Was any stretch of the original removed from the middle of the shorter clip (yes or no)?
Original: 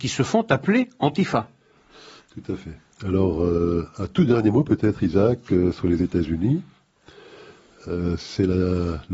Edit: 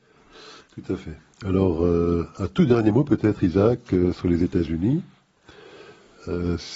no